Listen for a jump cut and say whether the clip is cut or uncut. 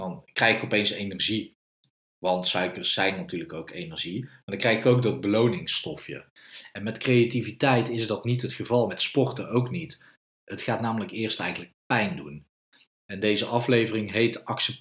uncut